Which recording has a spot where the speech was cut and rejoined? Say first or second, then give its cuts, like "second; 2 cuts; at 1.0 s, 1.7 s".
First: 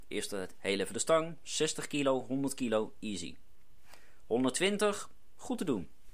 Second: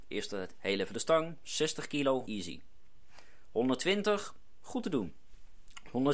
second; 1 cut; at 2.3 s